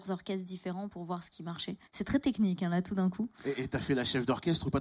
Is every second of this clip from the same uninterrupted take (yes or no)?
no